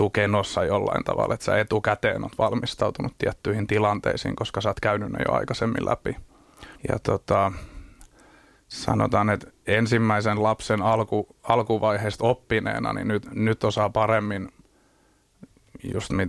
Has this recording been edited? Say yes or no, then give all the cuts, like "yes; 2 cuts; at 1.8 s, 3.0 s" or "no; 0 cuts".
yes; 1 cut; at 6.8 s